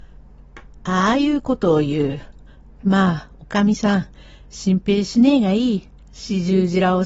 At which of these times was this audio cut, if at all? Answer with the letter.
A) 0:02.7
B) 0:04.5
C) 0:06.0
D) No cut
C